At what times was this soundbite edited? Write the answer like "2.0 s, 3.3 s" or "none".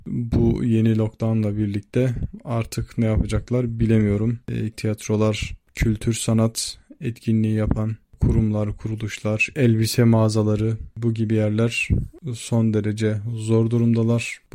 4.7 s, 9.5 s

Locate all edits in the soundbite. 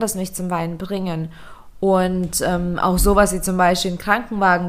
none

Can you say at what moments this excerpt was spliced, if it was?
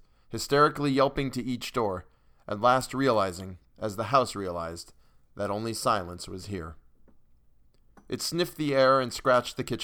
none

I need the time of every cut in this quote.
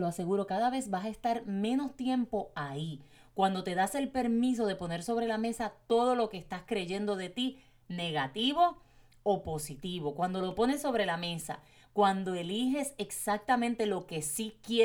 none

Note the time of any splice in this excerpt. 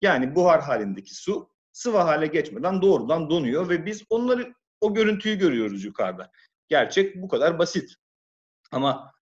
6.5 s

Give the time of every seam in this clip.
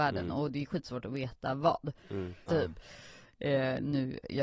2.5 s

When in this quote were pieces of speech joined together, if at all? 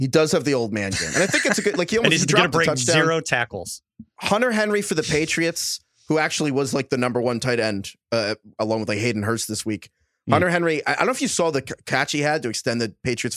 none

